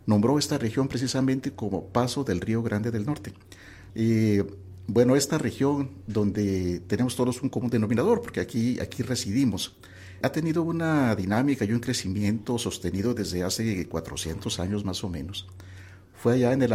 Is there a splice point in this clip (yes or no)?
yes